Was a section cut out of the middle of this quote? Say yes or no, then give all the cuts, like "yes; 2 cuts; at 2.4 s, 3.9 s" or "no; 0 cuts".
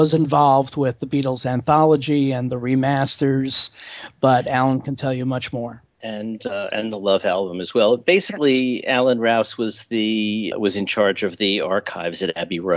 yes; 2 cuts; at 5.9 s, 10.5 s